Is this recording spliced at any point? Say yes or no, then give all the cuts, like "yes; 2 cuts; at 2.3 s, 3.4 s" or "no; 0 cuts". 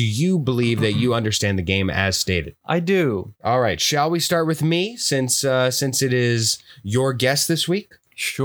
yes; 1 cut; at 3.4 s